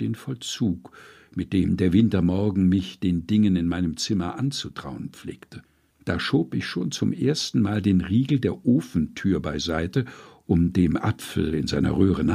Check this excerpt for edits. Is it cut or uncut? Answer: cut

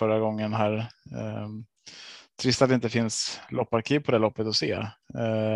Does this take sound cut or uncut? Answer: uncut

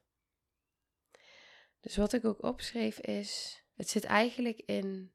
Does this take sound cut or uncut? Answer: cut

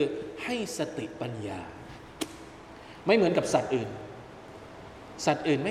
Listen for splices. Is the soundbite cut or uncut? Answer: uncut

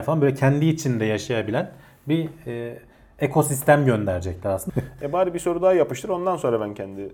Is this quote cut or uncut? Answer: cut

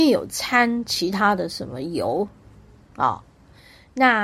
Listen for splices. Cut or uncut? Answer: uncut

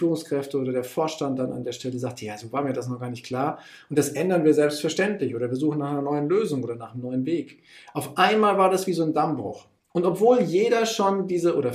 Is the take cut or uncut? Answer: uncut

